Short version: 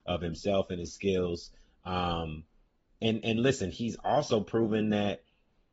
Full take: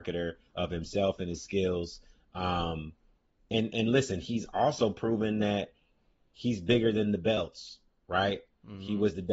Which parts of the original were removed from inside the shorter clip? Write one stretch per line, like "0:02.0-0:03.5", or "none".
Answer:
none

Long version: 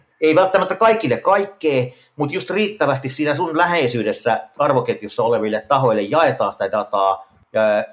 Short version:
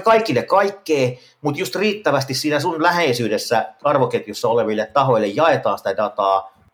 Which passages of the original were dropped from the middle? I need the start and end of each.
none

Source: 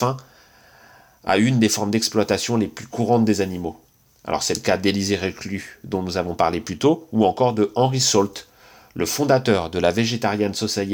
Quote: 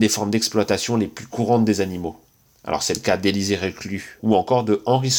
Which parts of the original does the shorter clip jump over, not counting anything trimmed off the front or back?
0:05.8-0:07.1

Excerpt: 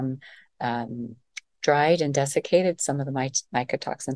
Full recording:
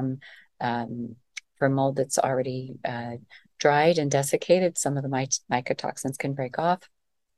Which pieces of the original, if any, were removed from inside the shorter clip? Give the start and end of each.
0:01.5-0:03.5

